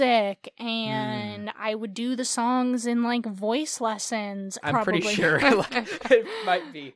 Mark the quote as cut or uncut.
cut